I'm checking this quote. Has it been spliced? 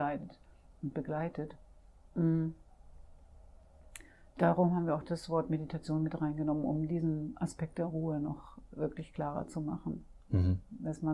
no; 0 cuts

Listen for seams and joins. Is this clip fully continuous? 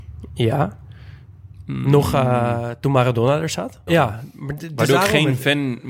no; 1 cut; at 3.9 s

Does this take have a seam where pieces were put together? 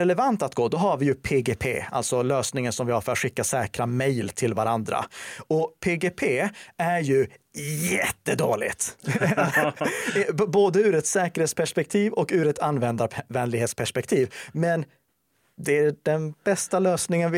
no; 0 cuts

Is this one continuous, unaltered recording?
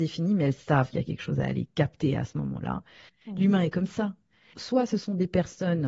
no; 2 cuts; at 3.1 s, 4.5 s

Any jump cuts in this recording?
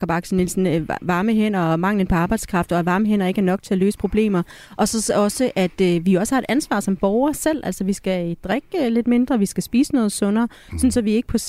no; 0 cuts

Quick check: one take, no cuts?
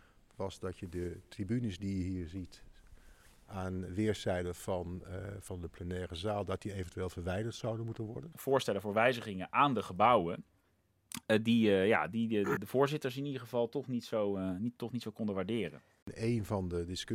no; 3 cuts; at 8.3 s, 12.6 s, 16.0 s

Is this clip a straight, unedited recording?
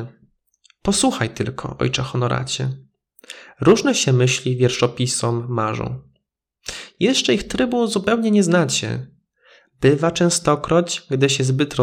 yes; 0 cuts

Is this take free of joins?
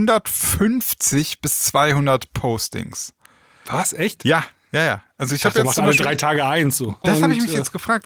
no; 1 cut; at 7.0 s

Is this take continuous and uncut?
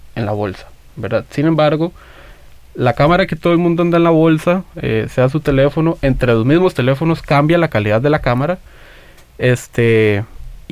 yes; 0 cuts

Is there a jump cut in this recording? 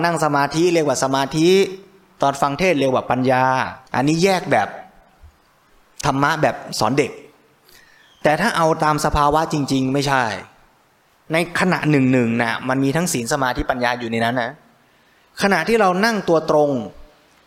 yes; 1 cut; at 3.9 s

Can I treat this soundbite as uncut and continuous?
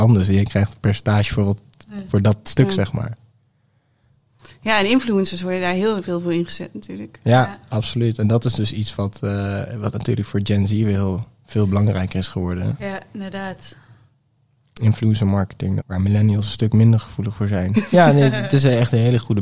no; 2 cuts; at 15.8 s, 17.7 s

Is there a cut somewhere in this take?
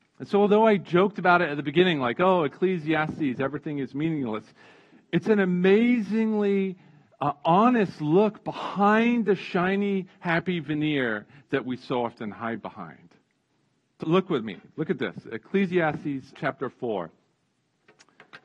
yes; 2 cuts; at 14.0 s, 16.3 s

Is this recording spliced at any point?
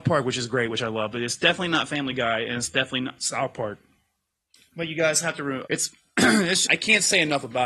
yes; 2 cuts; at 5.6 s, 6.7 s

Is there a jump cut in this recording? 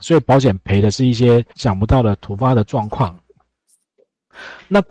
yes; 1 cut; at 1.5 s

